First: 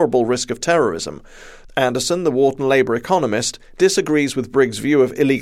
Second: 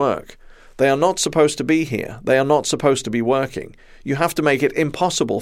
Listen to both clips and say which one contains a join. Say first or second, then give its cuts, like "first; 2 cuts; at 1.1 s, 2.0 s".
first; 1 cut; at 1.6 s